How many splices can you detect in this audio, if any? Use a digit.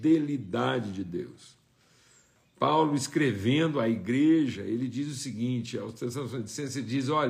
0